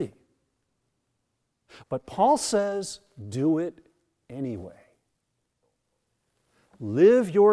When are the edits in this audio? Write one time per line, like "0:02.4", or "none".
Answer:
0:01.8